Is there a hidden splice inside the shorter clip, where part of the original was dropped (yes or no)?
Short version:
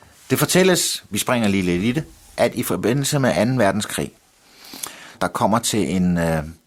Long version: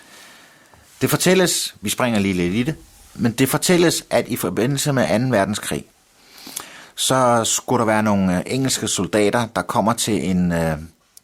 yes